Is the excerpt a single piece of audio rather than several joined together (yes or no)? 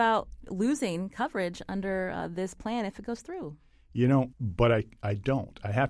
no